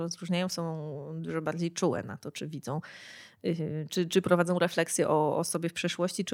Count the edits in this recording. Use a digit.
1